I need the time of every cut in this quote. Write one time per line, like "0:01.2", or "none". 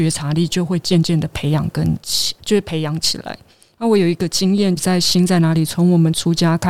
0:02.4
0:04.8